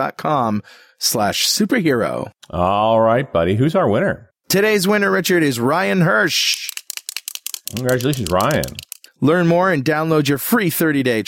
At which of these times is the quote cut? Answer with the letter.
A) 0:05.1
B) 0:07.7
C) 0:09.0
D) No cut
C